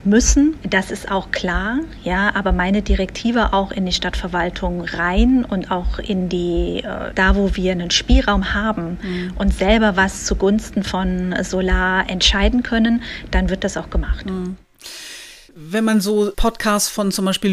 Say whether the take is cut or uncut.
cut